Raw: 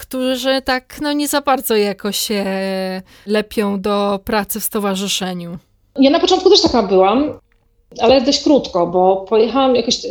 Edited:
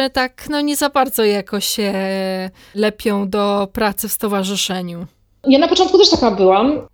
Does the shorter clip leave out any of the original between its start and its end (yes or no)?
no